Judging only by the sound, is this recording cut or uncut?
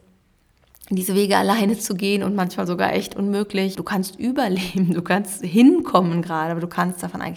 cut